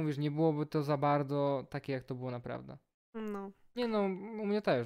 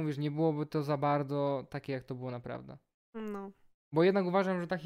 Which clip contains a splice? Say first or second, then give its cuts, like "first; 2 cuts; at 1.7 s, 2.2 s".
first; 1 cut; at 3.7 s